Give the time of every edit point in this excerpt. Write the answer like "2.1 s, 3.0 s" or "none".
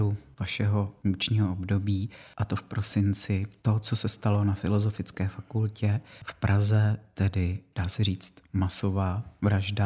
none